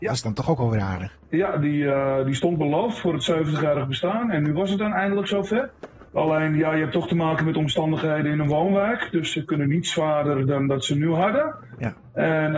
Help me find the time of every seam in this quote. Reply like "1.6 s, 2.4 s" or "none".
6.1 s